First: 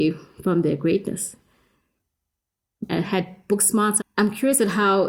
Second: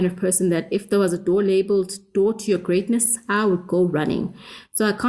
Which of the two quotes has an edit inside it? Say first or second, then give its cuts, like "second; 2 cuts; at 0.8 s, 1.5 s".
first; 2 cuts; at 2.9 s, 4.0 s